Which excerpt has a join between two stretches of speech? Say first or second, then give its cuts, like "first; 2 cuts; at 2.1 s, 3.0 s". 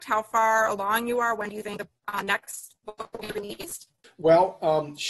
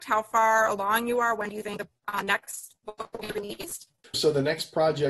second; 1 cut; at 4.1 s